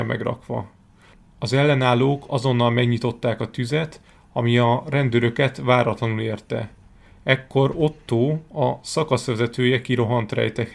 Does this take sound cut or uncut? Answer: uncut